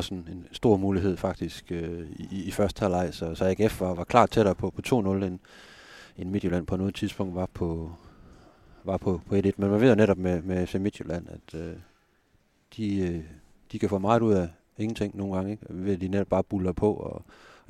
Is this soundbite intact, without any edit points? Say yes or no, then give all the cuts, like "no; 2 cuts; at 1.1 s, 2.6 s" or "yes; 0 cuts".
yes; 0 cuts